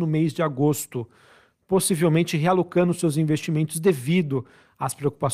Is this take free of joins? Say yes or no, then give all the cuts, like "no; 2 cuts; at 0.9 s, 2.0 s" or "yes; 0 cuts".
yes; 0 cuts